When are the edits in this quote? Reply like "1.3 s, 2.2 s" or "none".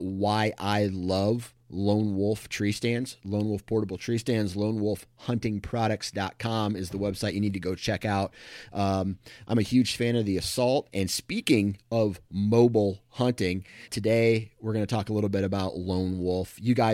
10.9 s, 13.9 s